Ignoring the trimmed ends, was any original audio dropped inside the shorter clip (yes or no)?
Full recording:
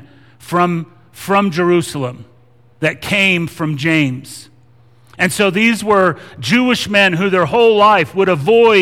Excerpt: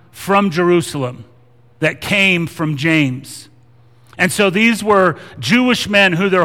no